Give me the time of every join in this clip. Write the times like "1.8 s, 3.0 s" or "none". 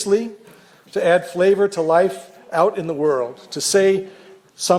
none